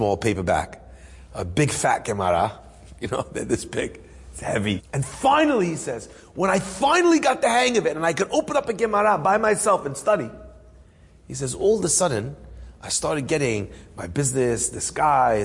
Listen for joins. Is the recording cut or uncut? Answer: cut